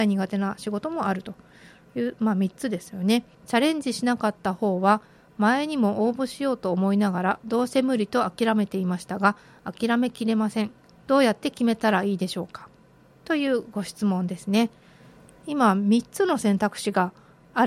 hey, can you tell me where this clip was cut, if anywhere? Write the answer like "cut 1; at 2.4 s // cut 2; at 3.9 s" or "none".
cut 1; at 3.3 s